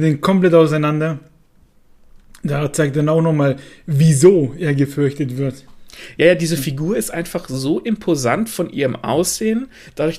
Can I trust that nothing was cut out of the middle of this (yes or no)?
yes